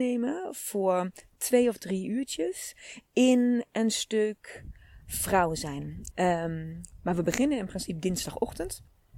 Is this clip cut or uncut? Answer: cut